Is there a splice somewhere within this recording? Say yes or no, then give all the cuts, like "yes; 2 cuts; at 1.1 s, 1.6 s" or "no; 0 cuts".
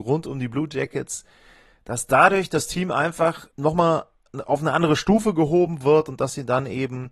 yes; 1 cut; at 3.5 s